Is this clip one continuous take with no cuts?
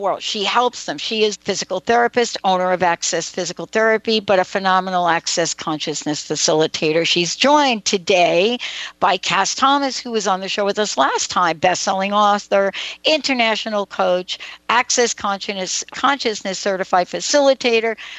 no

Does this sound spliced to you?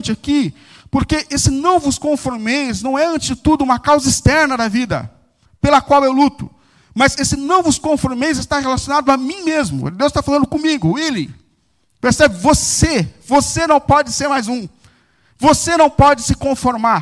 no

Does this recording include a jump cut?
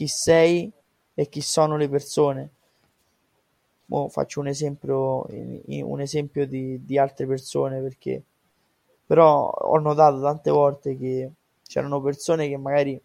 no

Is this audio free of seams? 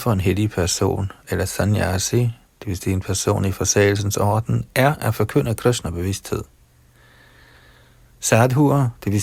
yes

